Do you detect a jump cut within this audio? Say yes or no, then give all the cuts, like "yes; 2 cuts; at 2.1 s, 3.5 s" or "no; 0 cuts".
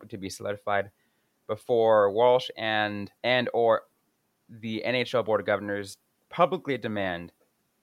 yes; 1 cut; at 3.2 s